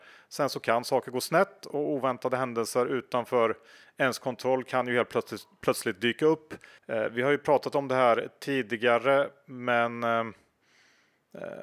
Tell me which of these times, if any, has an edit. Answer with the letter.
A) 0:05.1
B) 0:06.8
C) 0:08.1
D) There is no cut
B